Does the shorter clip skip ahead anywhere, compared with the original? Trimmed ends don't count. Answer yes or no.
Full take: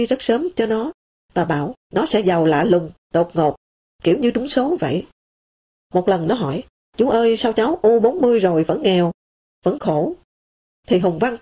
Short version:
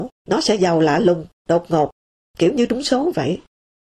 no